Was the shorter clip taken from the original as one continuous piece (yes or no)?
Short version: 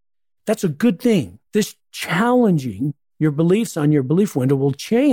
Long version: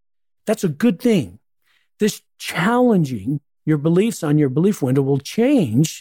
no